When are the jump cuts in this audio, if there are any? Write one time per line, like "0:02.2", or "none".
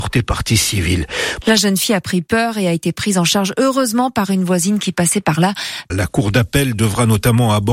0:01.4
0:05.9